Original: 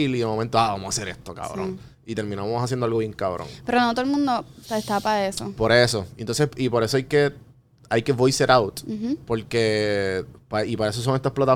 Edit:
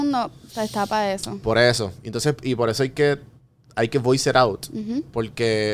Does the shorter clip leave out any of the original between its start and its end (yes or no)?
no